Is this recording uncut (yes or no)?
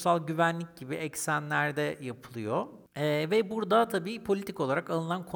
yes